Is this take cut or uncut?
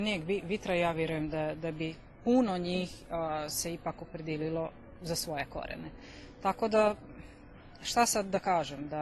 uncut